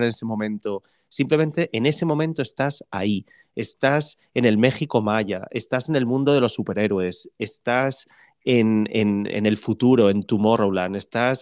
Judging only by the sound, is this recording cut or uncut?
uncut